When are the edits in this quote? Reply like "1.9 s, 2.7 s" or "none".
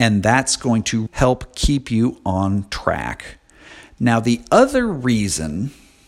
1.1 s